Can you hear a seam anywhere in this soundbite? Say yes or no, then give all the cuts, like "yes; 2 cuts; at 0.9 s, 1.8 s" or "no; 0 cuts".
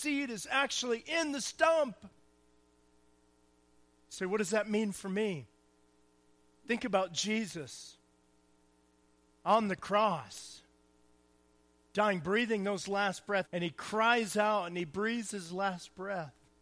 yes; 1 cut; at 13.5 s